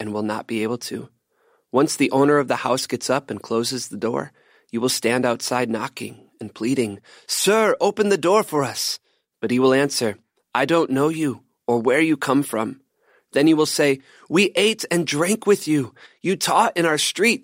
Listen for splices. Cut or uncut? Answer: uncut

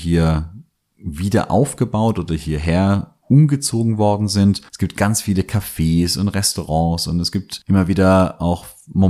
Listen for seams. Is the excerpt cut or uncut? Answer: cut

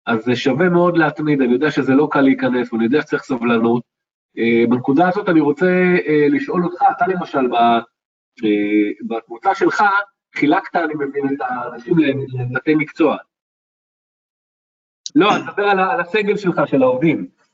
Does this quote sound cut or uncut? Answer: cut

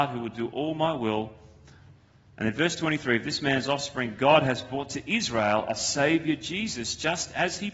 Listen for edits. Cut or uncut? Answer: uncut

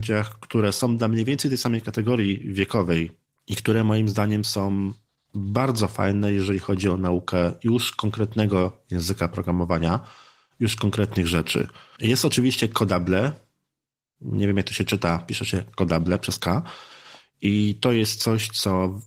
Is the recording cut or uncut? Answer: uncut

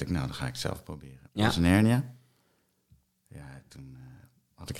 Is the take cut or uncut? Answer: cut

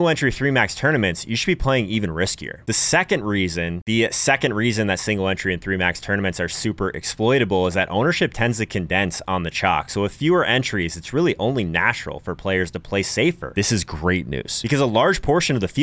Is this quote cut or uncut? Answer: uncut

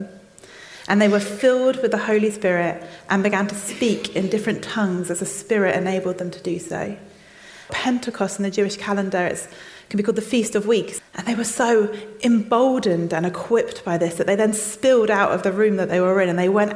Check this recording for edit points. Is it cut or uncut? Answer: cut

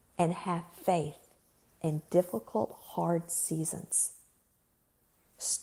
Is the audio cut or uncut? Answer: uncut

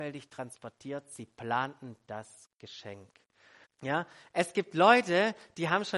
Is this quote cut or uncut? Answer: cut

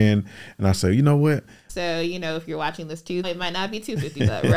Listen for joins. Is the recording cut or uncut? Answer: cut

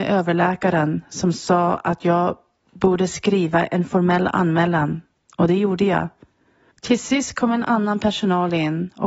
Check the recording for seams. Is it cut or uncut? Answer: cut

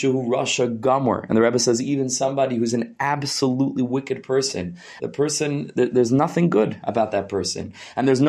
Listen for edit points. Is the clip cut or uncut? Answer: cut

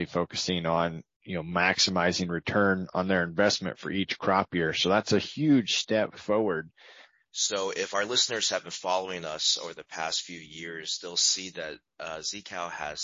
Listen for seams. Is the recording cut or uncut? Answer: cut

